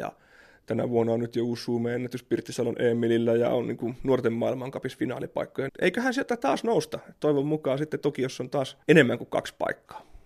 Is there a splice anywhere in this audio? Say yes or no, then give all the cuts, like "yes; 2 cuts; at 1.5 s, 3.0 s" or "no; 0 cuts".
yes; 2 cuts; at 5.7 s, 8.8 s